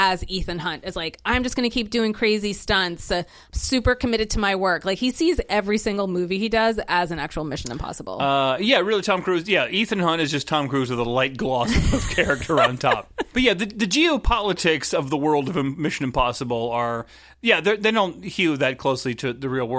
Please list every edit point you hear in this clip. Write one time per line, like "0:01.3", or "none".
0:13.3